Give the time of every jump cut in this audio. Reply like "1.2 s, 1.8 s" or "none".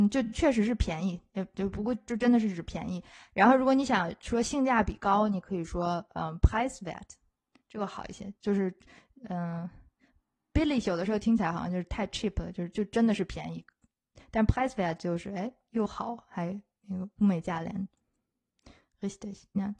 1.9 s